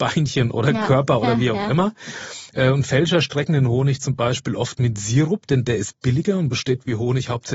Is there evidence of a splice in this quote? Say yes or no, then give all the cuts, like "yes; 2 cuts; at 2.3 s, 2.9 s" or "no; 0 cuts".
no; 0 cuts